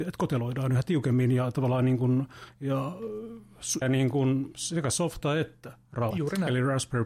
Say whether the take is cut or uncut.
cut